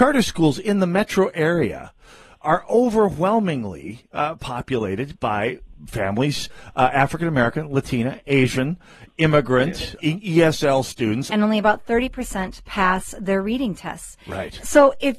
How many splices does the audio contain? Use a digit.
2